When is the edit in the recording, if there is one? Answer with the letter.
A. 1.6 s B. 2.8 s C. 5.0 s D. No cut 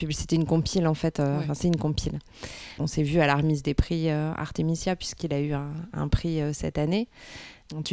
B